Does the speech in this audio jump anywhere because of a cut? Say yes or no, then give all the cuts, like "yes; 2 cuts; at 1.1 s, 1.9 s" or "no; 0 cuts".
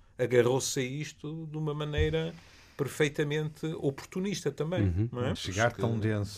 yes; 1 cut; at 5.4 s